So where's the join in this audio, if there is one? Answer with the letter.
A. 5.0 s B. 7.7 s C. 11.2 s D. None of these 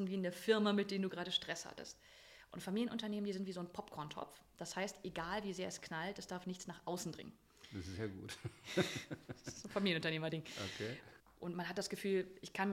C